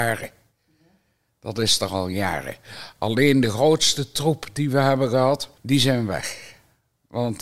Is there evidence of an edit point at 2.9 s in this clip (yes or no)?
no